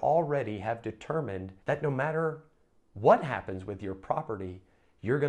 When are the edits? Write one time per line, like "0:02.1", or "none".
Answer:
0:01.6